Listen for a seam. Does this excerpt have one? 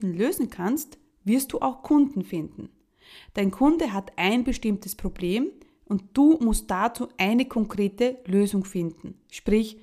no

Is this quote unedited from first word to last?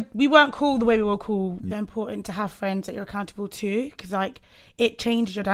no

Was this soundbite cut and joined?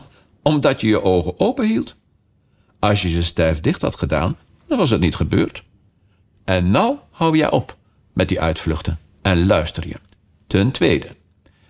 no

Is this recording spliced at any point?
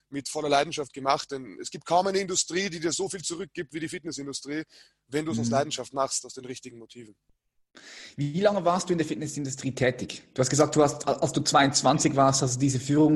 no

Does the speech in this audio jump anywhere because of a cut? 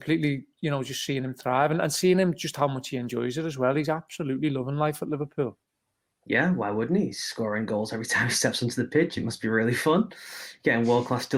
no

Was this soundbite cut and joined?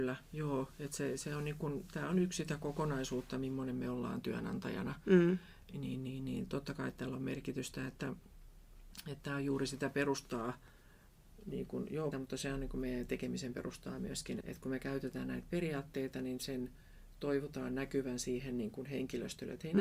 yes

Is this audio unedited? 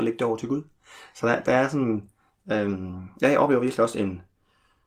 yes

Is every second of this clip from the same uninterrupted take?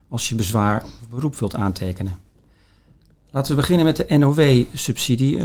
yes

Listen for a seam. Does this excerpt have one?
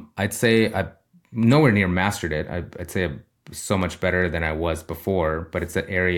no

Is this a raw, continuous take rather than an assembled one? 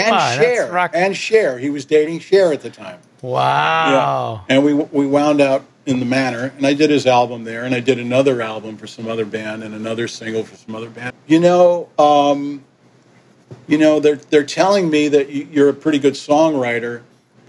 no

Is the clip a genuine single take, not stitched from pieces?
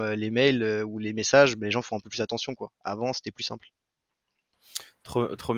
yes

